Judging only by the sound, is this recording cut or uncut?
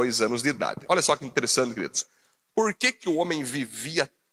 uncut